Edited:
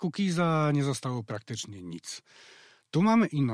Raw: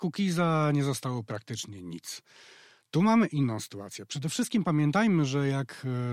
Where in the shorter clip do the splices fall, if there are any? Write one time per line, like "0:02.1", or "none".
none

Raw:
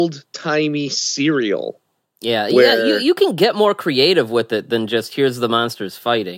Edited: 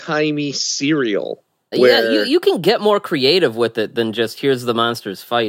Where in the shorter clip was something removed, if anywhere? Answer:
0:01.7

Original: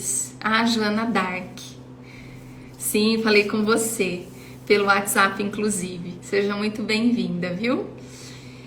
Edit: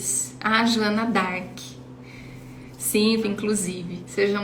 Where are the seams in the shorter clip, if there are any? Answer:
0:03.2

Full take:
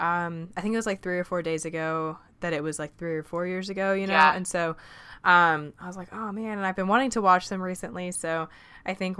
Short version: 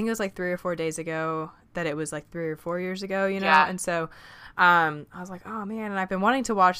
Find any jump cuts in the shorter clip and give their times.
none

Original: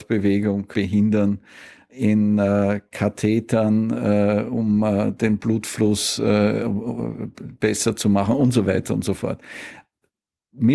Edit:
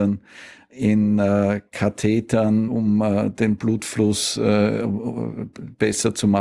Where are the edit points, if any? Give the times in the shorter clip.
0:02.7

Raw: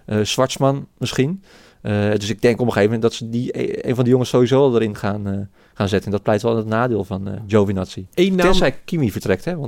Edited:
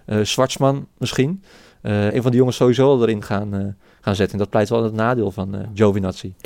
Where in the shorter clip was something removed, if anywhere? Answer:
0:02.1

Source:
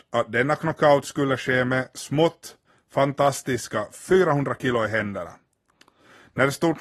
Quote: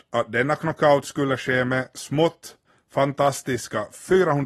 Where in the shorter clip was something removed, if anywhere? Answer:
none

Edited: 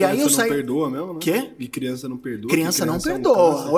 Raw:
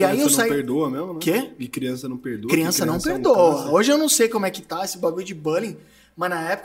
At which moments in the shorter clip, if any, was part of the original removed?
none

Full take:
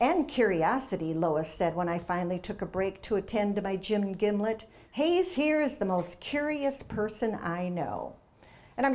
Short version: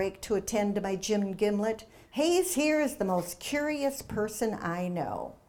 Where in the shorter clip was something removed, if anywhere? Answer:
none

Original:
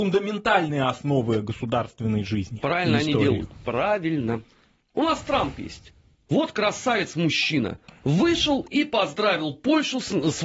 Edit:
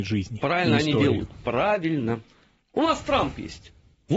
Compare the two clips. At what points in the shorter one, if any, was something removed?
none

